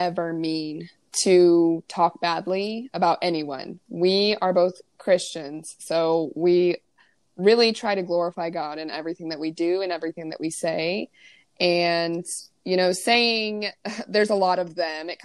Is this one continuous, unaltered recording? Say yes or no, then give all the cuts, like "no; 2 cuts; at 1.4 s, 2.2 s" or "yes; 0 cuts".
yes; 0 cuts